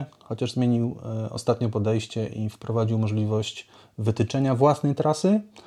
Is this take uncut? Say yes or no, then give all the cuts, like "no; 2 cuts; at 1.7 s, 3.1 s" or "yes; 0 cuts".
yes; 0 cuts